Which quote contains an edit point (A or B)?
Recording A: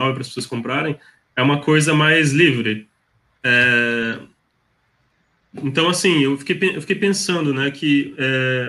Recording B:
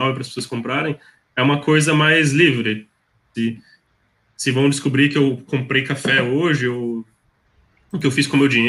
B